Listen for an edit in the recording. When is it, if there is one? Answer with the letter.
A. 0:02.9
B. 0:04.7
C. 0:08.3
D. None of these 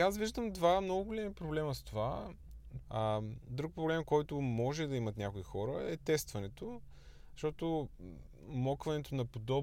A